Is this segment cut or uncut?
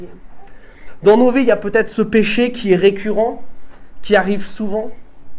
uncut